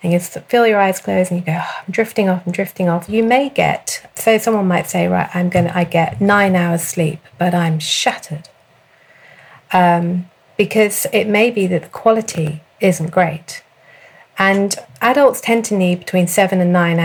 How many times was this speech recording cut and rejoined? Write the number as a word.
two